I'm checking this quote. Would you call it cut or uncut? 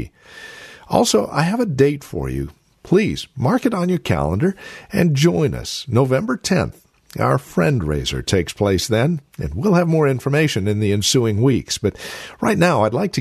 uncut